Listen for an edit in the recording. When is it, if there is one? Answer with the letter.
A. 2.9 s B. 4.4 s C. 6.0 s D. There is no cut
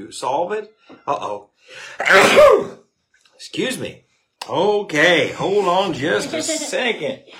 B